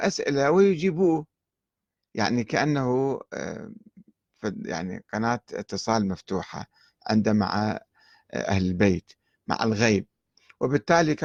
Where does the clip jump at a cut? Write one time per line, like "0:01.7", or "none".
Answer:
none